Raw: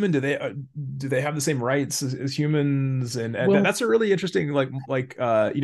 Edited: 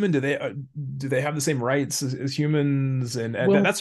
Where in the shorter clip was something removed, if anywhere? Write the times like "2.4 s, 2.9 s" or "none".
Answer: none